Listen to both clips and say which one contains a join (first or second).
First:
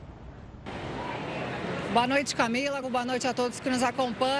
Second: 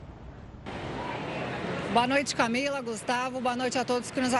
first